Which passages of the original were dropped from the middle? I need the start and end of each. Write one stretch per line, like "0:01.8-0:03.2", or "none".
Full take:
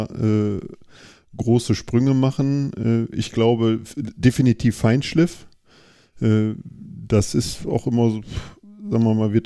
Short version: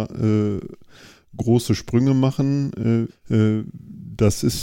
0:03.1-0:06.0